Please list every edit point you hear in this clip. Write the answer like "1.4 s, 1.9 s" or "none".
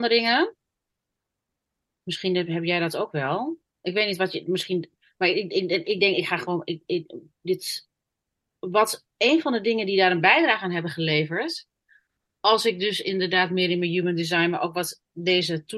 none